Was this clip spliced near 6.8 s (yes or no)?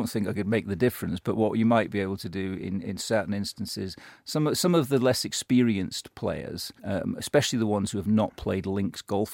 yes